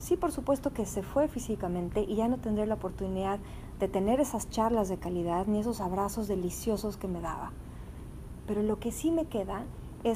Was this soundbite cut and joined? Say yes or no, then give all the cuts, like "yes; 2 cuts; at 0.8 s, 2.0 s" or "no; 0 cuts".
no; 0 cuts